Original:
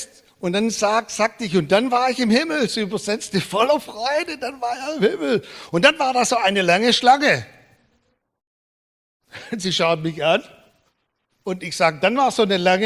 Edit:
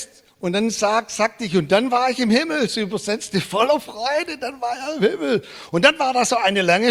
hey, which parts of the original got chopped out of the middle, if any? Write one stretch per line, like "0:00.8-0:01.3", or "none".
none